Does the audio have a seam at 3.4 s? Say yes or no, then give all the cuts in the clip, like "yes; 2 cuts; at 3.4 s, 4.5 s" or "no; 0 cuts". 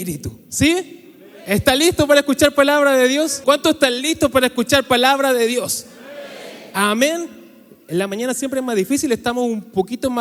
yes; 1 cut; at 3.4 s